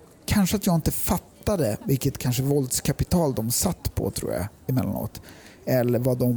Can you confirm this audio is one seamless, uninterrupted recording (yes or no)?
yes